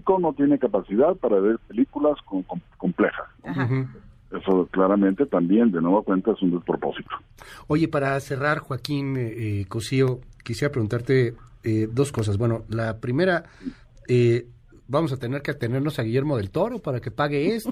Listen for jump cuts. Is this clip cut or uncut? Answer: uncut